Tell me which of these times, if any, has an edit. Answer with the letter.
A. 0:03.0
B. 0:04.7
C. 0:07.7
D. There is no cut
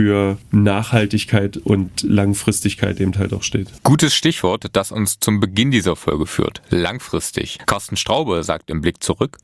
C